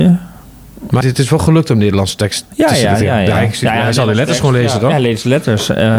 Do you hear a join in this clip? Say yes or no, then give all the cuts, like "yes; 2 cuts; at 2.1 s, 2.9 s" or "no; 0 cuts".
yes; 1 cut; at 1.0 s